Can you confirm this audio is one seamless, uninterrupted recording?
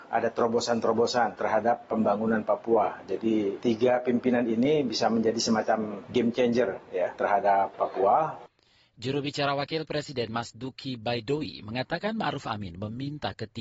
yes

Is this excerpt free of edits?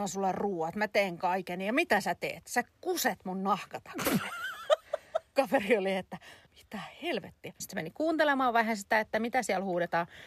no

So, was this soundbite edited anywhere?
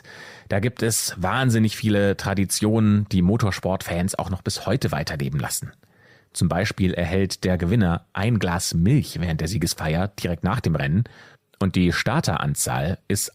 no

